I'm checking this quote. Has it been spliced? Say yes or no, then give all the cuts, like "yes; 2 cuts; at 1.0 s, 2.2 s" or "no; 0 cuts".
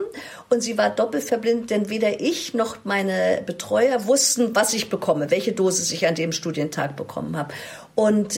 no; 0 cuts